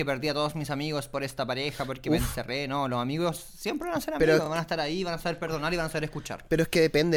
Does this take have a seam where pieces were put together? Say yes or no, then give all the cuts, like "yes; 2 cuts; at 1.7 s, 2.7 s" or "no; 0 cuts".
no; 0 cuts